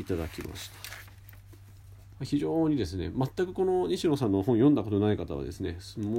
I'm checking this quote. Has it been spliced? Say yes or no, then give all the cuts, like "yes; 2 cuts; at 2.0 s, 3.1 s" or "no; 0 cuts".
yes; 1 cut; at 2.1 s